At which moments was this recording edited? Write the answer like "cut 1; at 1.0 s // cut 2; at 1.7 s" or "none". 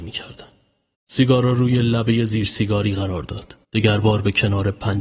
cut 1; at 0.9 s // cut 2; at 3.6 s